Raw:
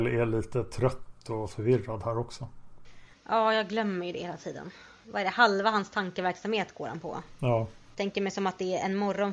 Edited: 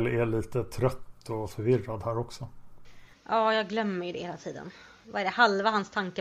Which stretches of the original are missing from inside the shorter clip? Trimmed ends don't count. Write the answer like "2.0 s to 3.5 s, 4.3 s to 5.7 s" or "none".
none